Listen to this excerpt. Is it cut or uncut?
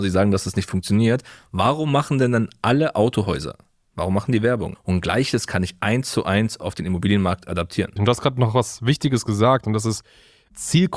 cut